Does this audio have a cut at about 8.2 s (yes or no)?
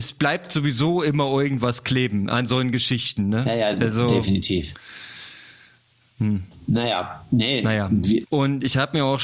yes